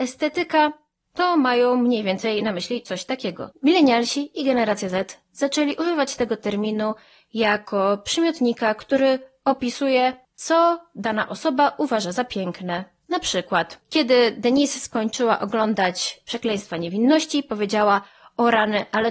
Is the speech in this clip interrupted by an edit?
yes; 1 cut; at 3.5 s

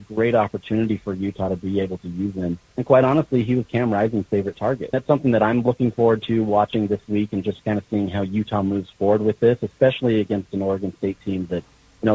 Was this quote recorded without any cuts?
no; 1 cut; at 4.9 s

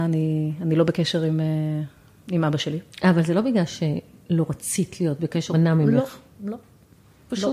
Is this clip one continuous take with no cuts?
no; 1 cut; at 5.5 s

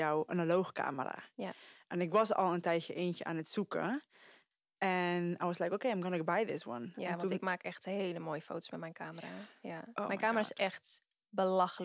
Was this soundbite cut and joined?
no; 0 cuts

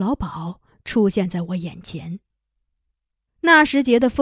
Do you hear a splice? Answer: yes; 1 cut; at 3.3 s

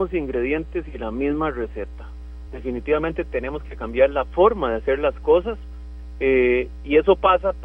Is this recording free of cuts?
yes; 0 cuts

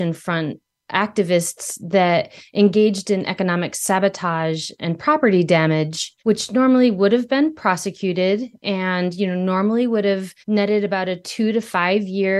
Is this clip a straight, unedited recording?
no; 2 cuts; at 6.2 s, 10.4 s

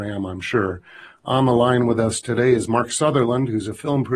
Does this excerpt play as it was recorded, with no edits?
yes; 0 cuts

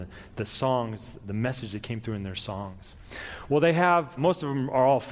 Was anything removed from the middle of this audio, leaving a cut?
yes; 1 cut; at 4.2 s

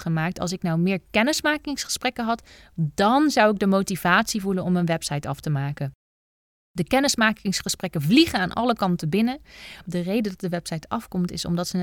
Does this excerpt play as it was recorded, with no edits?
no; 1 cut; at 9.8 s

